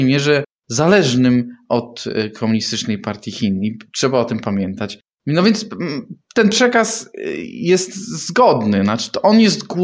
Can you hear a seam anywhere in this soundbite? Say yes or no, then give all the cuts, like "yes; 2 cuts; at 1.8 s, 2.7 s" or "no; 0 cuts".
no; 0 cuts